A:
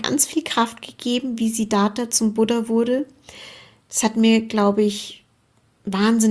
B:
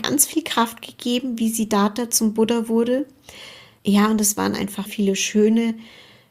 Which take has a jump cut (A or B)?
B